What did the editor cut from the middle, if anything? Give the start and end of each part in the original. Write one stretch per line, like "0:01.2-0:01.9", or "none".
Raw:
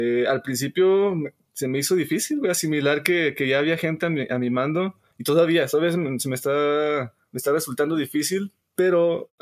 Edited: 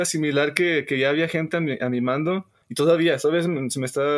none